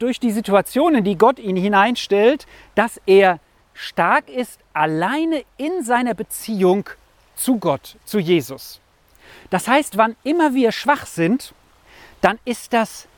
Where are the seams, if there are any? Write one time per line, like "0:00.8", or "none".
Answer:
none